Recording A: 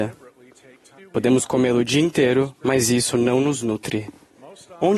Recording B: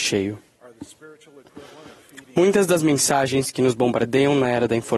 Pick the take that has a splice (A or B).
A